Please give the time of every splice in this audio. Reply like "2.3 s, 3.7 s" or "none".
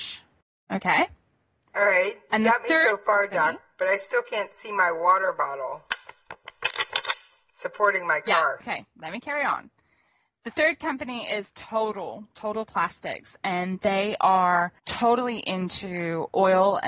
8.6 s